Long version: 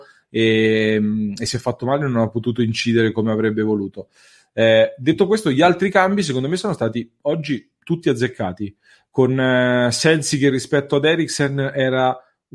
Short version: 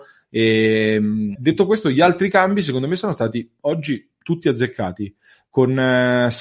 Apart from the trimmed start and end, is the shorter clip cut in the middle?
yes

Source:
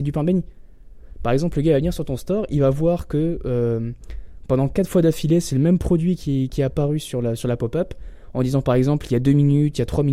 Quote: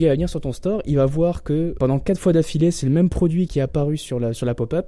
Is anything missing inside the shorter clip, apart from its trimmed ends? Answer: yes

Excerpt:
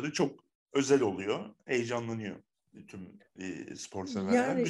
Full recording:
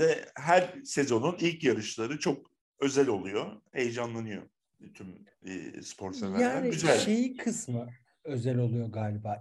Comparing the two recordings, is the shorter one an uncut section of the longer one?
yes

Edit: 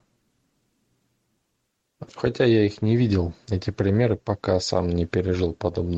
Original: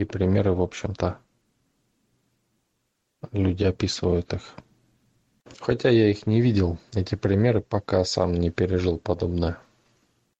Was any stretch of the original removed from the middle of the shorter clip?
yes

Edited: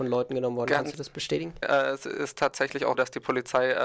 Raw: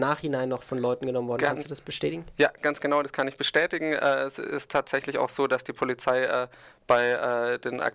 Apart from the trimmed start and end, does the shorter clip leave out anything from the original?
yes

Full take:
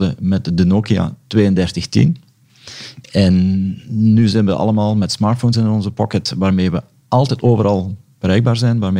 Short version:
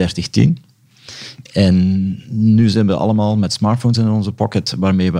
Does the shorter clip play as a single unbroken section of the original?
yes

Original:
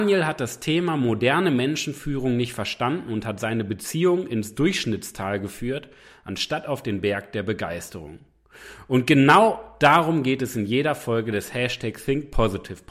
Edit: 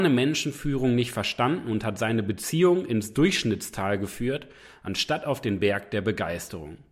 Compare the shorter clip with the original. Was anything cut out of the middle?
no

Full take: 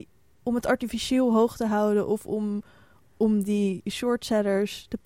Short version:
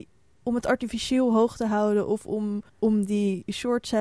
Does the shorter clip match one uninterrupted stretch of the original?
no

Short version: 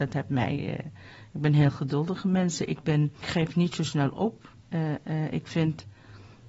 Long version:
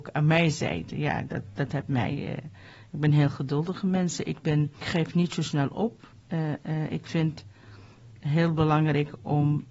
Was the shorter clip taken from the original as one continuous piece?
yes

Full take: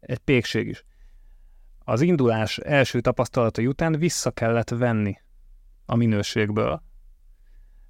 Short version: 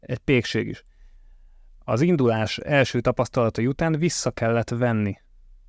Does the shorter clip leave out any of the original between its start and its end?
no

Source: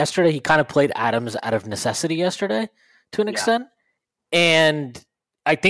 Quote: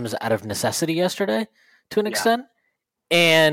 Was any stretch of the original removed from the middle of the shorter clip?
no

